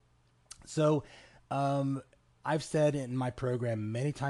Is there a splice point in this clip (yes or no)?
no